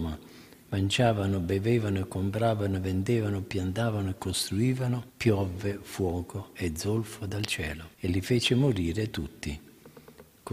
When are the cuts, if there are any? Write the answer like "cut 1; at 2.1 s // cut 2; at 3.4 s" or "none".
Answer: cut 1; at 5.1 s // cut 2; at 7.9 s